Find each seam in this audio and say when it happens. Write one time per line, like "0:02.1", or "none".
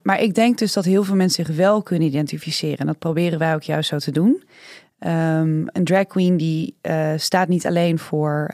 0:05.7